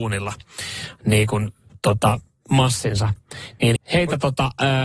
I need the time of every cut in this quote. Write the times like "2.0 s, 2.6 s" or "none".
3.8 s